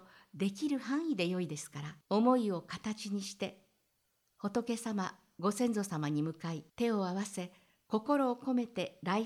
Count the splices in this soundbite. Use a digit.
2